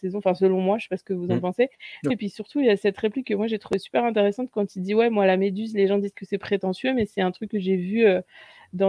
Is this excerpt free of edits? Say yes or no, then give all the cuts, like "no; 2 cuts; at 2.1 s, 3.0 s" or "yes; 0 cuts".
no; 1 cut; at 2.1 s